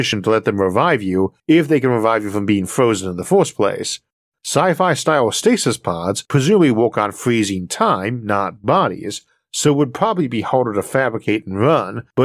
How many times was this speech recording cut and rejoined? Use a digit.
0